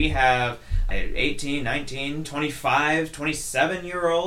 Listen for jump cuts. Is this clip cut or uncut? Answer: cut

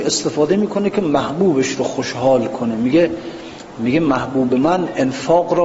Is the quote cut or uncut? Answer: uncut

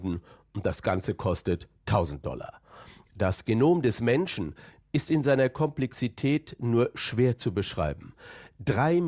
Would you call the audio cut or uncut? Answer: cut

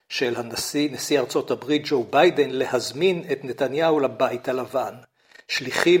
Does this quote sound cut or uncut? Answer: uncut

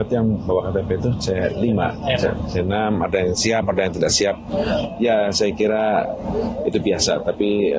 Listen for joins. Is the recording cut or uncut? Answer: uncut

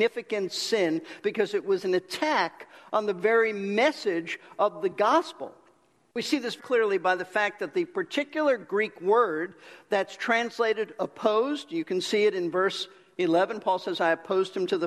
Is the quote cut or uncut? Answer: cut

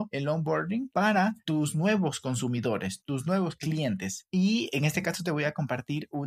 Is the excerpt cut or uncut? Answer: cut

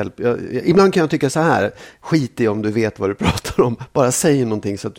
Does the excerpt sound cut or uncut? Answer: uncut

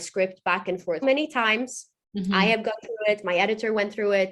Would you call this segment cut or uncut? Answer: cut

